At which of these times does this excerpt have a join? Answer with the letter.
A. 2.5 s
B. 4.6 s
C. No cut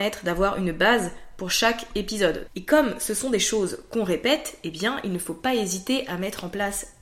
A